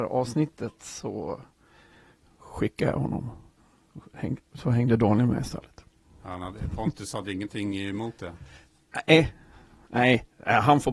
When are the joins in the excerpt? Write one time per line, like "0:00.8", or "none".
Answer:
none